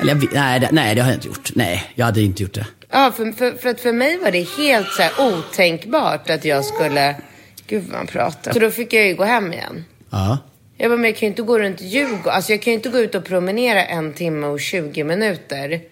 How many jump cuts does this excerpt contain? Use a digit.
2